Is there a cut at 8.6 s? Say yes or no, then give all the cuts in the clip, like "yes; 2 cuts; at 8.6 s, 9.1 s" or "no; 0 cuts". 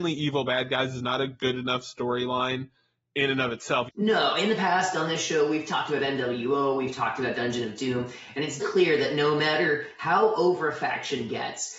yes; 2 cuts; at 3.9 s, 8.6 s